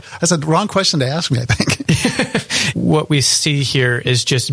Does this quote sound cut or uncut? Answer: cut